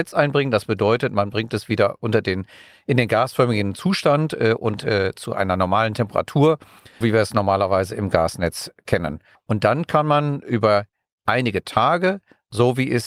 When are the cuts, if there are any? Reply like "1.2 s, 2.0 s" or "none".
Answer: 7.0 s, 9.4 s